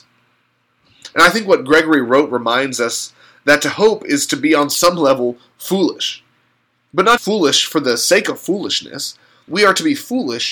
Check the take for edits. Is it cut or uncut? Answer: cut